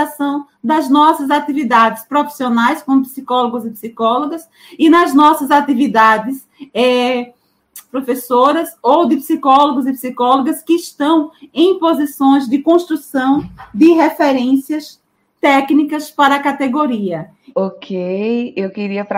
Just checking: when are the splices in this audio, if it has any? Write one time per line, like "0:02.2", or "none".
0:07.9
0:17.5